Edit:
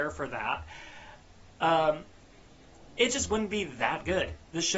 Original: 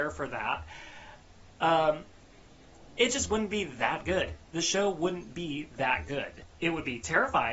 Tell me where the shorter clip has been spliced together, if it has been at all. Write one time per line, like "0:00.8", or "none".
none